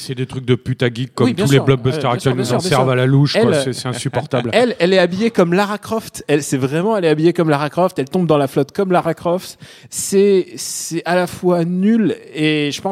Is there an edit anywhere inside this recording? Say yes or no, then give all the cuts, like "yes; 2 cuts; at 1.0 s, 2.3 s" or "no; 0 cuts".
no; 0 cuts